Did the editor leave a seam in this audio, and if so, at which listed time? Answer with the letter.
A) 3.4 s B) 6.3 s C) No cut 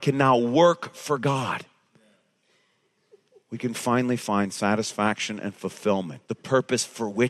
B